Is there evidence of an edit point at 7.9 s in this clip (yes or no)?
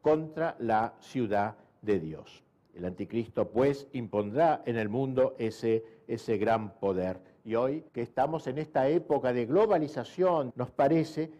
yes